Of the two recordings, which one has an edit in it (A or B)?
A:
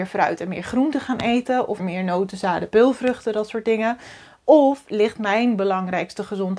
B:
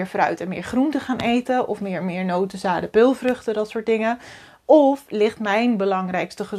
A